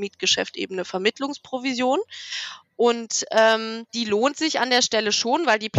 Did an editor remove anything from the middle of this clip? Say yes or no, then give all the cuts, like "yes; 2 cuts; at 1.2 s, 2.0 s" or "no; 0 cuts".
yes; 1 cut; at 3.9 s